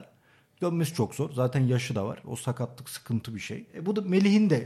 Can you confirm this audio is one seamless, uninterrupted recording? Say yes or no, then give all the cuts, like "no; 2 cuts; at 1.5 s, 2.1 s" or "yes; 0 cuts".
no; 2 cuts; at 0.9 s, 3.7 s